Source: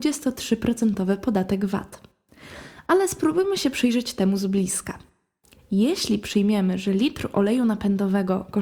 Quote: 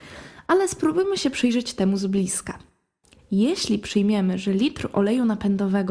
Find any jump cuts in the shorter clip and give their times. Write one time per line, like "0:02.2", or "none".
none